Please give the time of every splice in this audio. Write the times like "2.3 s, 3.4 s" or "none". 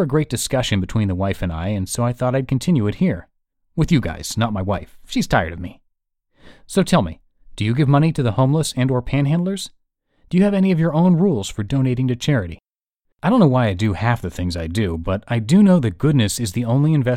none